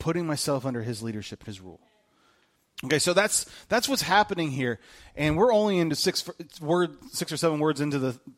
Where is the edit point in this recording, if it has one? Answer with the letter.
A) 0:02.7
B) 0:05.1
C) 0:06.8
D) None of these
A